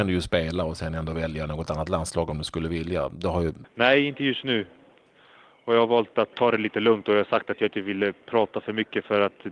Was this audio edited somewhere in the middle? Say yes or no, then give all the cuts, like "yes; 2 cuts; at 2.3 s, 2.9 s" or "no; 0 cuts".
yes; 2 cuts; at 3.6 s, 6.3 s